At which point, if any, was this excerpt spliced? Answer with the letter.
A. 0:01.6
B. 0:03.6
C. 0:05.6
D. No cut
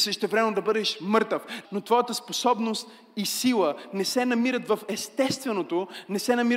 A